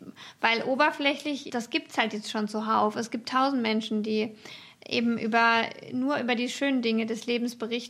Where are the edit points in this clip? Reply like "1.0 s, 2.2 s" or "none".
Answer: 1.5 s